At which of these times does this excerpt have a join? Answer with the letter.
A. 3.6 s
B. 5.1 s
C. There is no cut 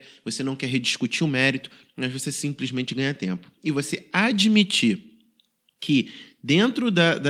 C